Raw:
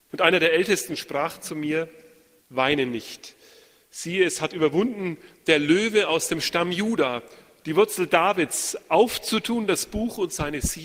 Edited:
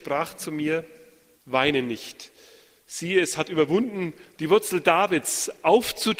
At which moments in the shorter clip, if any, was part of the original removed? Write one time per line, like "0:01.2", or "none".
0:04.3